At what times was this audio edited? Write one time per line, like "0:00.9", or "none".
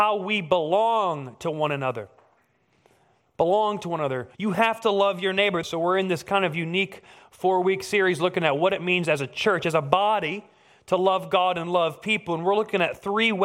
0:04.3
0:05.6